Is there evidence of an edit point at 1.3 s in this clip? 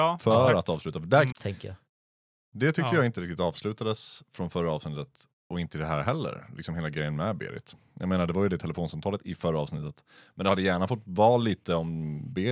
yes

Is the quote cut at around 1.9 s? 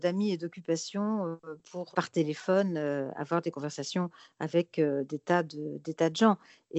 yes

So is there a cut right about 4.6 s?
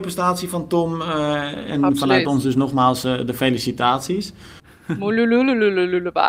yes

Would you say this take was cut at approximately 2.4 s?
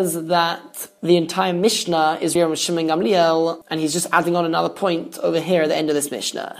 yes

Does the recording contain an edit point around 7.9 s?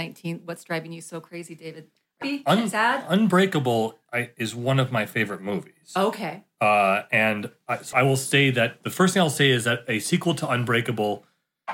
yes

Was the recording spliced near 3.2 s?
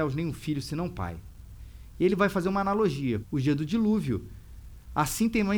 yes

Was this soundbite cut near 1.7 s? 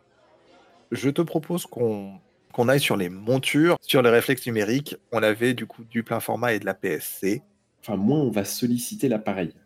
no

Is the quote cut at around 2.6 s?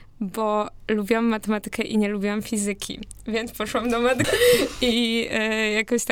no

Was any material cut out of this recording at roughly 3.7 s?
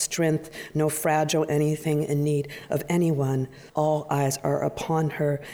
yes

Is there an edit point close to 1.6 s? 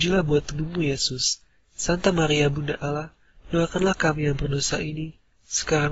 no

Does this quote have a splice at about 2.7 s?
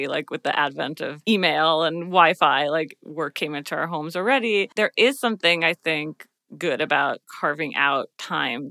no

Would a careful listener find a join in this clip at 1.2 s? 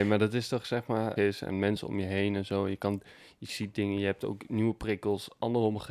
yes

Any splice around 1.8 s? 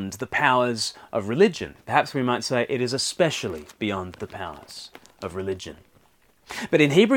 yes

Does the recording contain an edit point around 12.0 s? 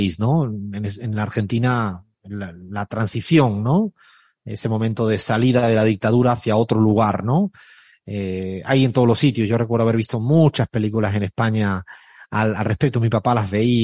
no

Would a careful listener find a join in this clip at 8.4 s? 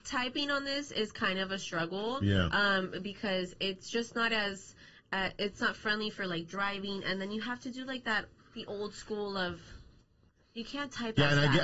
yes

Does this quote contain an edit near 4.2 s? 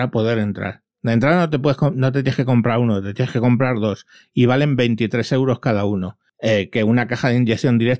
no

